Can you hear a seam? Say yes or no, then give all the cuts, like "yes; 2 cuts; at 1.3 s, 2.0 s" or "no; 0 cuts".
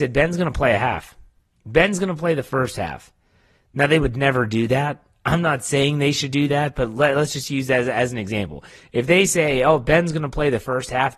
no; 0 cuts